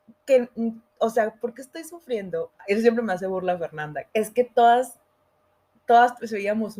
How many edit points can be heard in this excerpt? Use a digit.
2